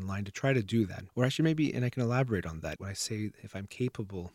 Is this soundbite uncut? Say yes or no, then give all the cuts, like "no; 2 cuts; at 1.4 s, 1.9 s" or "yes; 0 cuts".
no; 2 cuts; at 1.1 s, 2.8 s